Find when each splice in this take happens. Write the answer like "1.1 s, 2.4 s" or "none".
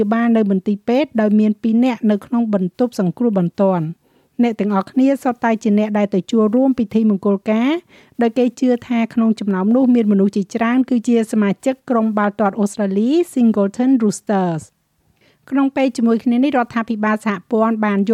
none